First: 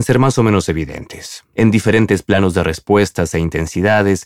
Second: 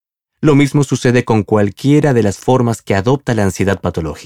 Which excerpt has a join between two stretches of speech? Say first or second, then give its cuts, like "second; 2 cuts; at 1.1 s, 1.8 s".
first; 1 cut; at 1.5 s